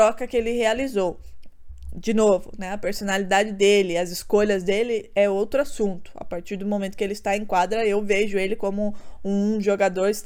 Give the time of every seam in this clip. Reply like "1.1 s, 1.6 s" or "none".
none

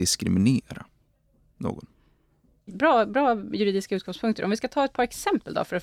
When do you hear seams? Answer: 2.7 s

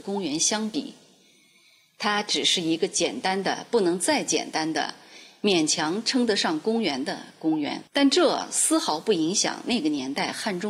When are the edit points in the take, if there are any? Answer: 7.9 s

